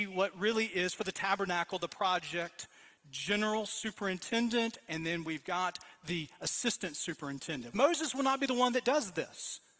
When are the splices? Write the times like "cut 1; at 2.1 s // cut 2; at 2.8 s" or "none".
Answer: cut 1; at 7.7 s